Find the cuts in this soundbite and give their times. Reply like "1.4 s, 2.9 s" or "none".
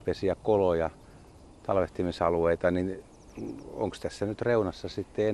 none

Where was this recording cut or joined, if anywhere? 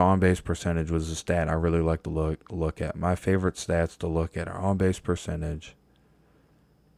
none

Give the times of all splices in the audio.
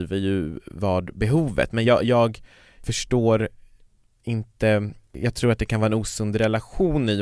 none

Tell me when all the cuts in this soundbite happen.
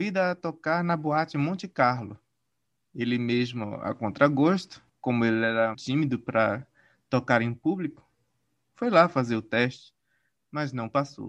5.7 s

